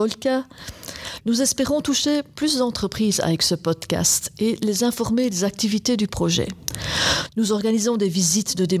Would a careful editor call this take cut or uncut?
cut